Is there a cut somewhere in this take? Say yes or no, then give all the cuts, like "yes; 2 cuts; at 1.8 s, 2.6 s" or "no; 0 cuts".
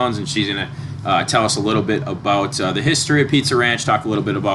no; 0 cuts